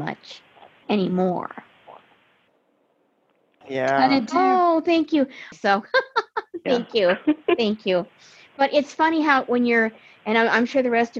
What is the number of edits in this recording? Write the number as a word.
two